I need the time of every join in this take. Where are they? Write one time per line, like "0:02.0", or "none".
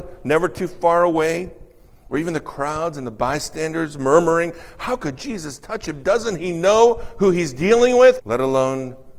0:08.2